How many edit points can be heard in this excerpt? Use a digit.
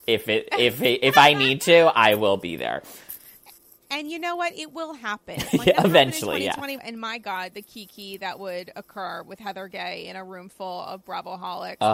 1